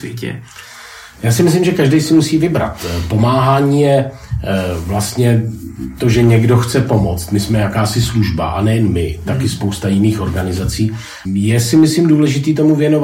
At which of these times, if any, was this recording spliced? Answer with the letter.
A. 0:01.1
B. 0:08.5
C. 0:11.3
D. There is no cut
C